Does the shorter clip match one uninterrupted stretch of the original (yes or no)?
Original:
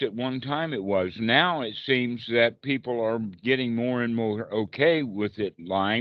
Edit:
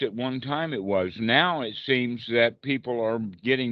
yes